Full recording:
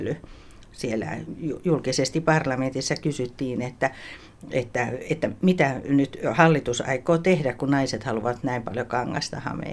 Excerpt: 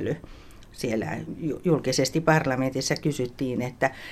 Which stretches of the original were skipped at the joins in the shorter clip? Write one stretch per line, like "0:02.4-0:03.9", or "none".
none